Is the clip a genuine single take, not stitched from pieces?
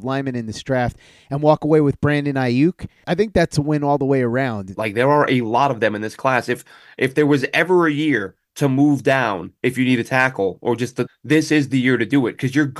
no; 2 cuts; at 4.7 s, 11.1 s

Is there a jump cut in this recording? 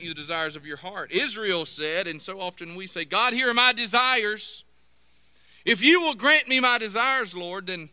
no; 0 cuts

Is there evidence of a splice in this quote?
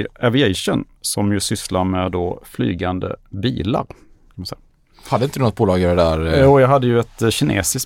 no; 0 cuts

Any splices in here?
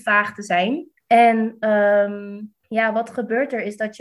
yes; 2 cuts; at 1.0 s, 2.6 s

